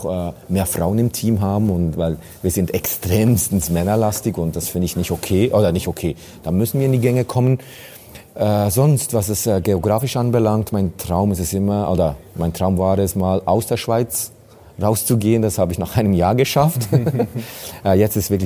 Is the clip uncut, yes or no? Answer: yes